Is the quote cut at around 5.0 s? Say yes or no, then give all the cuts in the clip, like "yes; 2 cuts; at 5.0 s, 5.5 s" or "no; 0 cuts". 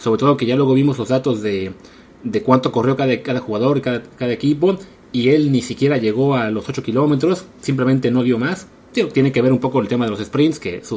no; 0 cuts